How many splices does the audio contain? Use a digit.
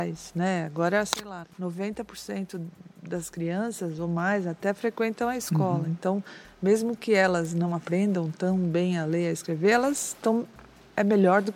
1